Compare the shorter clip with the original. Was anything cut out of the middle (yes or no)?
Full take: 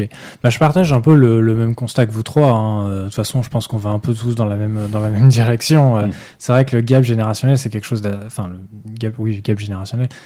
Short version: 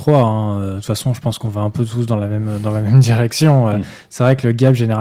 no